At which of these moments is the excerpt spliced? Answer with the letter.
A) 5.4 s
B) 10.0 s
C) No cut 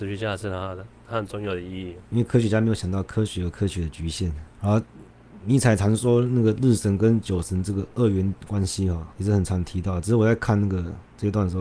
C